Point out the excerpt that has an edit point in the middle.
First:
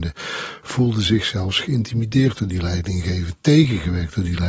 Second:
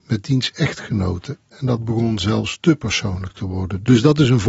second; 1 cut; at 1.5 s

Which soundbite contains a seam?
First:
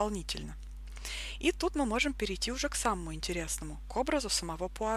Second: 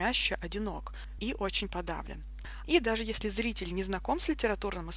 second; 2 cuts; at 1.2 s, 2.6 s

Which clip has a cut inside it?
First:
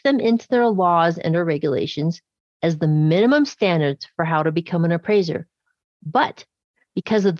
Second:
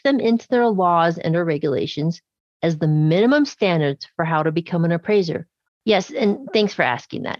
second; 1 cut; at 5.7 s

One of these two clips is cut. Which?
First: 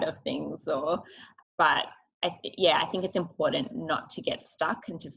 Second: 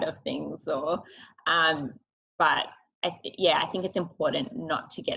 first; 1 cut; at 1.4 s

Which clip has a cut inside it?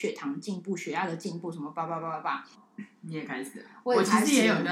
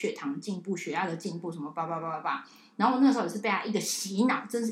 first; 1 cut; at 2.5 s

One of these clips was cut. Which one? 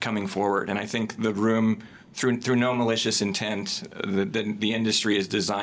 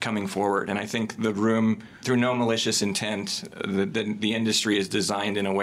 second; 1 cut; at 2.0 s

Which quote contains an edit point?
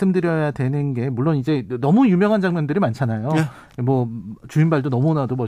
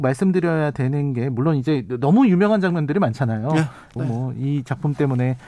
second; 1 cut; at 4.0 s

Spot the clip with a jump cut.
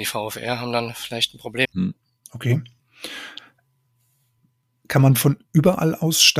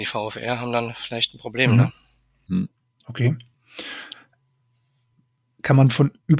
first; 1 cut; at 1.6 s

